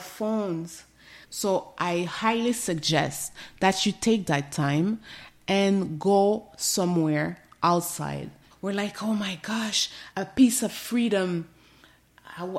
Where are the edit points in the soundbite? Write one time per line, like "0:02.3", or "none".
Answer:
0:01.2
0:08.5
0:10.1